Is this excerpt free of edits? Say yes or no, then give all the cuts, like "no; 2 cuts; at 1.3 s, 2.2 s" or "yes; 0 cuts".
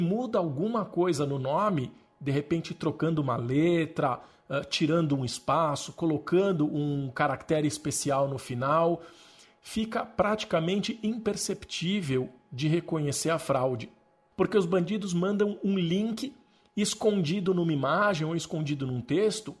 no; 1 cut; at 14.3 s